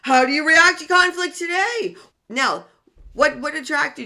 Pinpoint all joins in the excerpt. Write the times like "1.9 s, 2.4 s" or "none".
2.1 s